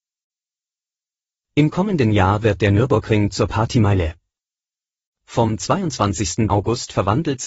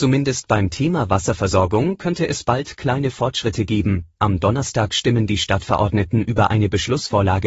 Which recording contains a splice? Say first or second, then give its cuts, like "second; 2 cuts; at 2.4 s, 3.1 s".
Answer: first; 1 cut; at 6.5 s